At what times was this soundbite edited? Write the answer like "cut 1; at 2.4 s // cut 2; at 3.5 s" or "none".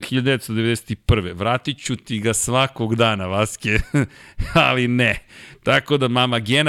cut 1; at 5.5 s